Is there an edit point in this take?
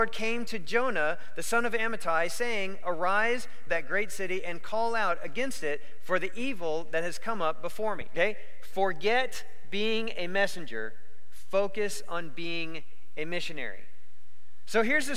yes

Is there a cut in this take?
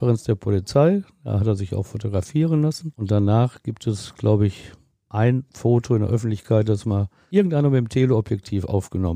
no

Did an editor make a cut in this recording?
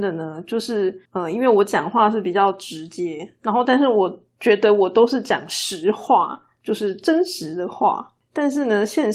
yes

